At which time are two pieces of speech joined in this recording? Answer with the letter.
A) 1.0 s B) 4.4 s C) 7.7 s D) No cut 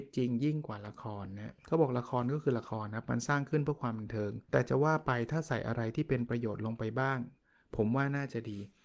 B